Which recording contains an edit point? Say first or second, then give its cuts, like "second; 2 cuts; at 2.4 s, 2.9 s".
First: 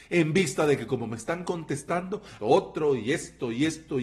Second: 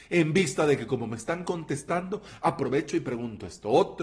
first; 1 cut; at 2.4 s